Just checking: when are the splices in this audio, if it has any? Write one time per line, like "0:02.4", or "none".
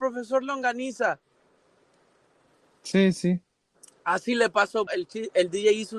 0:04.9